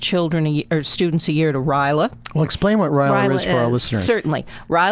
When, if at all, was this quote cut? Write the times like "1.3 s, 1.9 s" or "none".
none